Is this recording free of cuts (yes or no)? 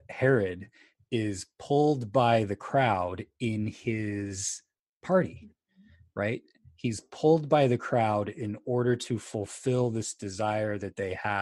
yes